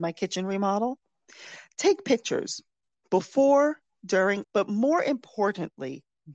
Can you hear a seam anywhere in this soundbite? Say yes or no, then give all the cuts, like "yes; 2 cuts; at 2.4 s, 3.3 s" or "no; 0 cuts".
yes; 1 cut; at 4.4 s